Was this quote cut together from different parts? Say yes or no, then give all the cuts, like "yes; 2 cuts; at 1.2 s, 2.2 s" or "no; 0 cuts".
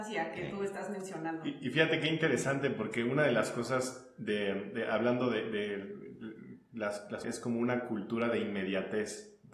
yes; 1 cut; at 7.2 s